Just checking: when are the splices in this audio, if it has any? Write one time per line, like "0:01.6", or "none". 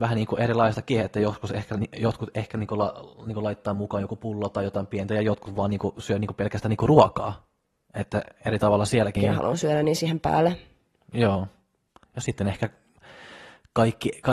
0:09.2